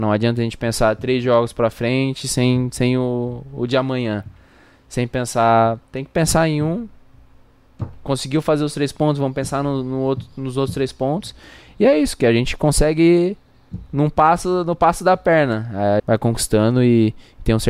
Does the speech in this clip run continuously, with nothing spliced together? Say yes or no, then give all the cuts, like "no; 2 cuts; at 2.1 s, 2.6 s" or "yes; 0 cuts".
no; 2 cuts; at 5.9 s, 16.0 s